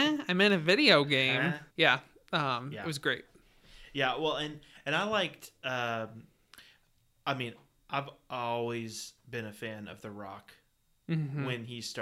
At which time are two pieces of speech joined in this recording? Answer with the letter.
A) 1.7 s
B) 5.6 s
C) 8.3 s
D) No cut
A